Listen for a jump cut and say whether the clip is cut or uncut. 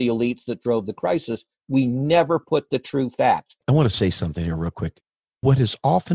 cut